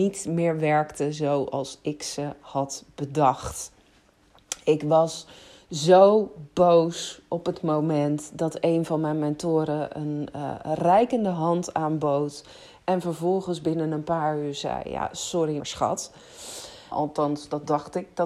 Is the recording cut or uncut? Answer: cut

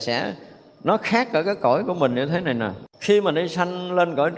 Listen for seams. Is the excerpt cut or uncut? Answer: cut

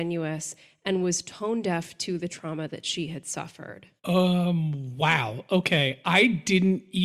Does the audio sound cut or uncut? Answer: cut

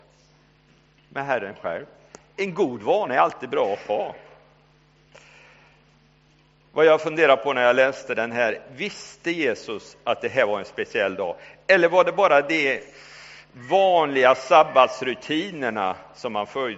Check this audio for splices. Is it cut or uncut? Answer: uncut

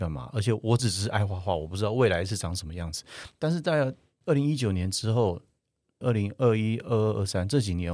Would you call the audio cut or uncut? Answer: cut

